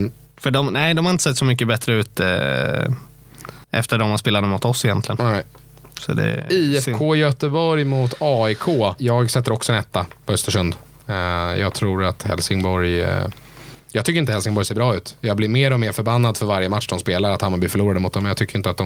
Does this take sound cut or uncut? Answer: cut